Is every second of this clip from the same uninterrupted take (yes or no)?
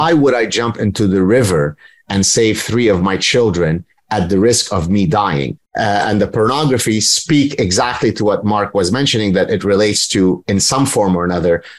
no